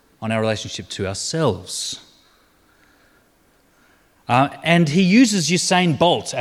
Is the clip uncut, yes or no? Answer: yes